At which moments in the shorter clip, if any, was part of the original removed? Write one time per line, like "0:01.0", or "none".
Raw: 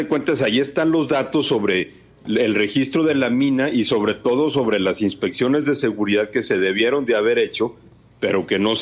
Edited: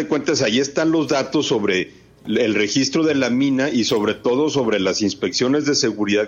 none